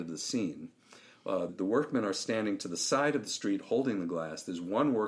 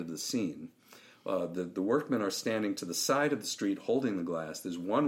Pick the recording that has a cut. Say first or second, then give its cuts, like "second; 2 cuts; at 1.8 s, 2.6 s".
first; 1 cut; at 1.5 s